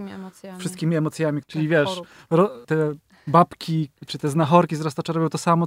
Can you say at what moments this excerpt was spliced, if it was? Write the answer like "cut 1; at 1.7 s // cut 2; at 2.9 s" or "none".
cut 1; at 1.4 s // cut 2; at 2.6 s // cut 3; at 4.0 s